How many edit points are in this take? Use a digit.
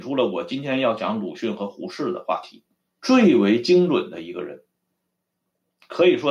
1